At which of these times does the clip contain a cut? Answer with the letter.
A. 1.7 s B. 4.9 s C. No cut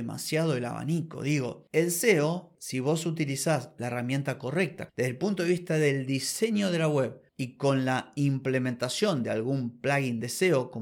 B